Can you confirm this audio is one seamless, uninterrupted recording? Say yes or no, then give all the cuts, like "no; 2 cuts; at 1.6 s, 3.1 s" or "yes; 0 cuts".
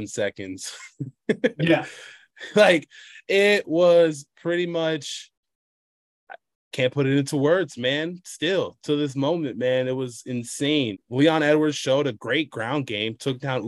no; 2 cuts; at 10.9 s, 12.2 s